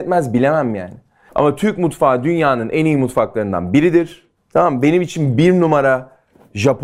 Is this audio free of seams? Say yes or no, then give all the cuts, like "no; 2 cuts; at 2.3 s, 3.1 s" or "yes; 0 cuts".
yes; 0 cuts